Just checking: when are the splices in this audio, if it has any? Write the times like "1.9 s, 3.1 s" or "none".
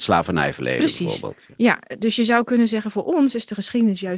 none

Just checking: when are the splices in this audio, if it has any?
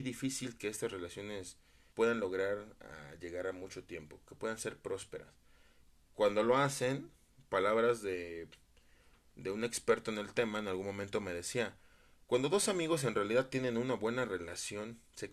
1.9 s

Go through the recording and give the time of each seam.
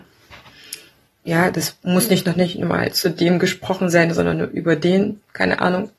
1.1 s

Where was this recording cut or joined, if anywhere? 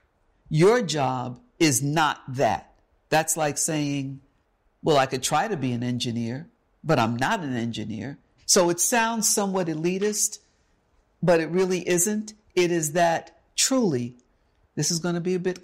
8.4 s

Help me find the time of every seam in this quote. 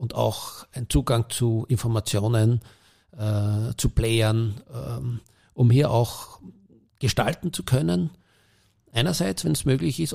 none

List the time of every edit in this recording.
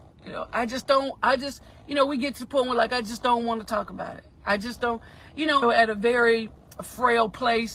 5.6 s

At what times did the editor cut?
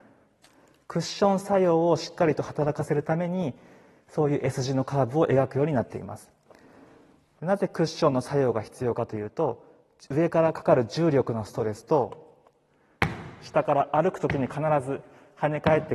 none

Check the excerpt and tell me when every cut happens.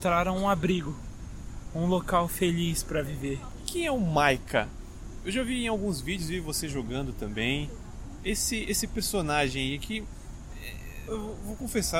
11.1 s

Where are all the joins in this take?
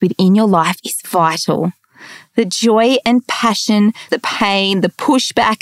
4.1 s

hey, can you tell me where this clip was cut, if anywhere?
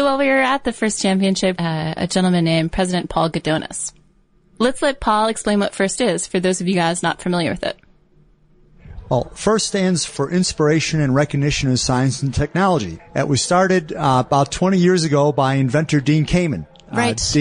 1.6 s, 10.1 s, 13.0 s

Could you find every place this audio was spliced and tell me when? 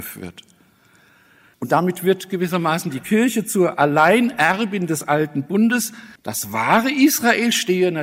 1.5 s, 6.2 s

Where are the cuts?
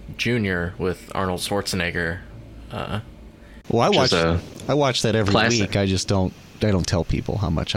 none

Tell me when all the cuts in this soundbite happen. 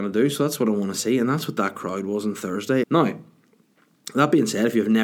2.8 s

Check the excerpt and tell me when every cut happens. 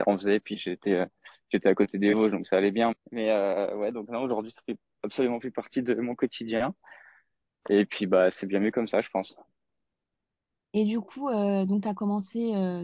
2.9 s

